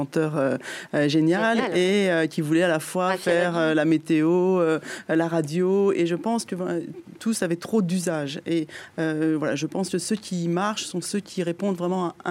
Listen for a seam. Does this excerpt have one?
no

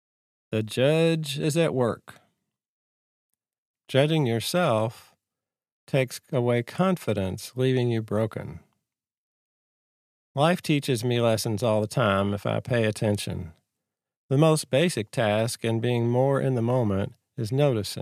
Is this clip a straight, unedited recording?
no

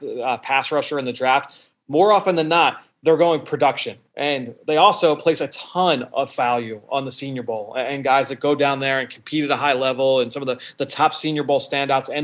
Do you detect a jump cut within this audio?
no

